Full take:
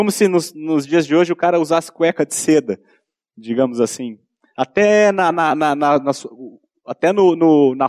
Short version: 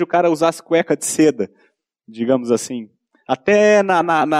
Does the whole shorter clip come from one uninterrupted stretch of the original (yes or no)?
yes